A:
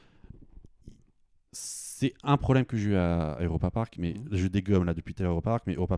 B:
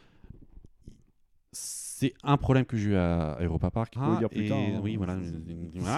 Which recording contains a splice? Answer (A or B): B